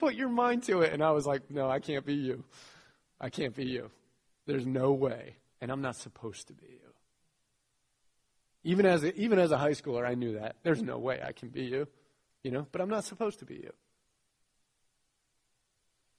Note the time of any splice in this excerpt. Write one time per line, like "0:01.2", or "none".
0:05.5